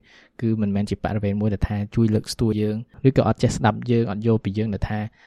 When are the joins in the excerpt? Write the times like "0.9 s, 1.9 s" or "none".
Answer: 2.5 s

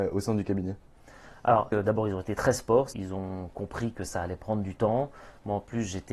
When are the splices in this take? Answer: 1.7 s, 2.9 s

